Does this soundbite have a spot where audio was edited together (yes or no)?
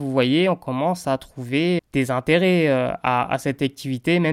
yes